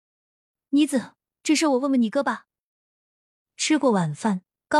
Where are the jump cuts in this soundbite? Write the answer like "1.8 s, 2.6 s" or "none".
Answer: 3.4 s